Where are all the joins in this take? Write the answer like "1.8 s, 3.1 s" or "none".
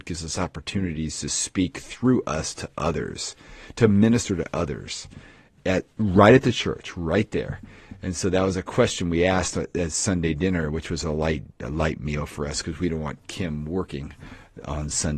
11.0 s